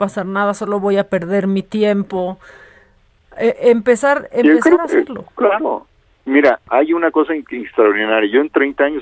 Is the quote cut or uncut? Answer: uncut